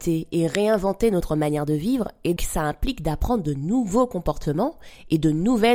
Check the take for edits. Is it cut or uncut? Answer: cut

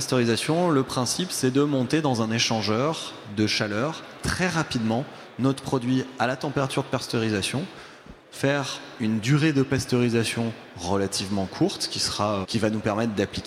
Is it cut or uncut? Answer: cut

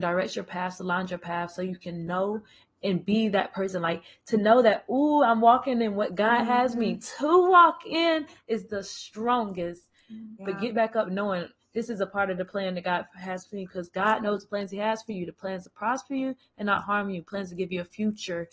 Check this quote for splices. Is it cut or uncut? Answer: cut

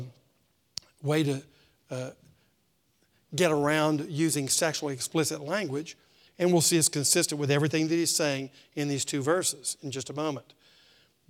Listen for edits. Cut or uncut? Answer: cut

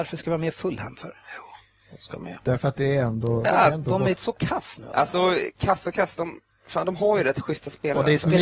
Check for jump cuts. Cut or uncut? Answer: uncut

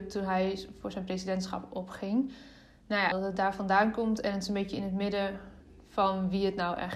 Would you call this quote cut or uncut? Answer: cut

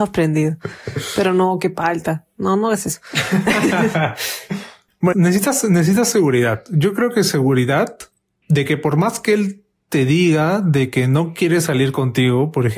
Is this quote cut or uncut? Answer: cut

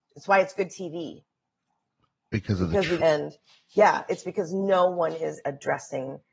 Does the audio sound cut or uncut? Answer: cut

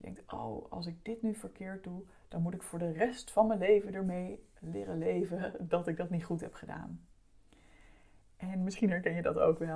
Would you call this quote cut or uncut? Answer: uncut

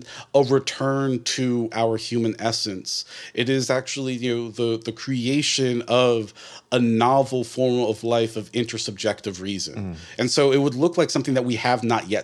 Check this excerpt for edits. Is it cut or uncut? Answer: uncut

